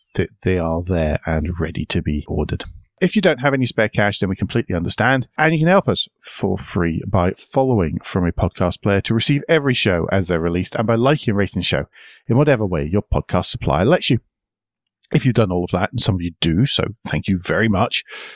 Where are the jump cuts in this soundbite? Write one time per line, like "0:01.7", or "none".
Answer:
none